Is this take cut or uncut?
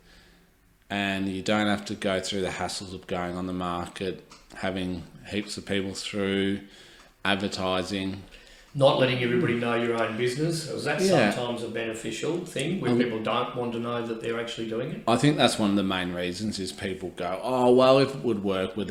uncut